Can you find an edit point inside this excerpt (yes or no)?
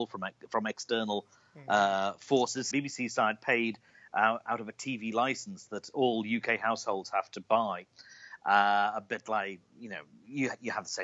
yes